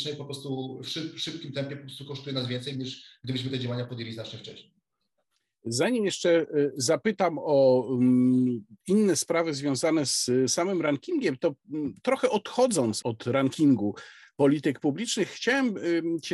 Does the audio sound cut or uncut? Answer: cut